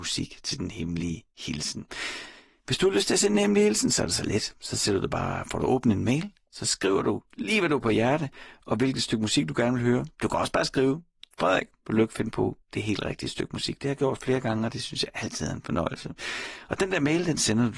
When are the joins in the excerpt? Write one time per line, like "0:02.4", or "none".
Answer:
none